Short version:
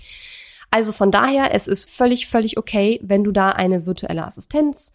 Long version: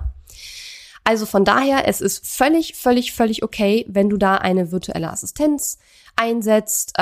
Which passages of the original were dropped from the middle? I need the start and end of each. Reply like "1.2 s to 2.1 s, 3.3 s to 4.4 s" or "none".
2.2 s to 2.7 s